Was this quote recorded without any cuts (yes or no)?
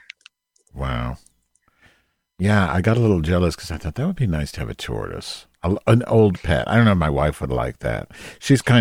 yes